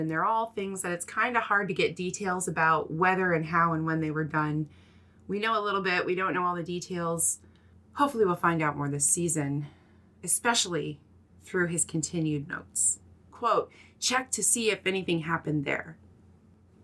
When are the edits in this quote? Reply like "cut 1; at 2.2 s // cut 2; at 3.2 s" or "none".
cut 1; at 13.3 s